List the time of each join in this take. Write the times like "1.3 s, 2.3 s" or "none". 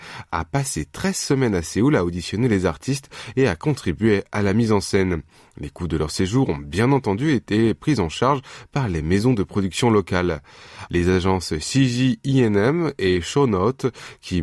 10.9 s